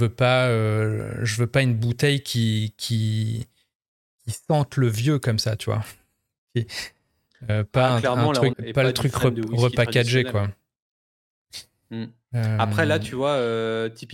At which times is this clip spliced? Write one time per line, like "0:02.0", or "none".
0:08.5